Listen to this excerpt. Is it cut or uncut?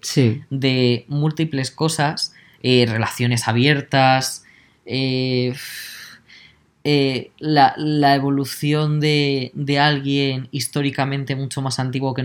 uncut